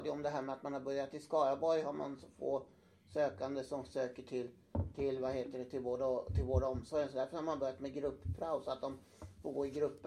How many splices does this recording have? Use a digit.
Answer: 0